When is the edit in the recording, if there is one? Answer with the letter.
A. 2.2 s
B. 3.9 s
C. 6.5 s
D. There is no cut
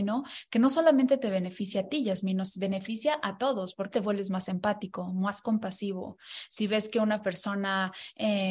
B